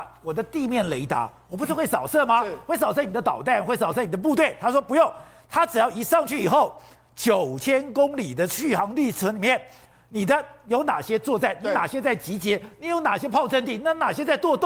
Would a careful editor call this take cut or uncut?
uncut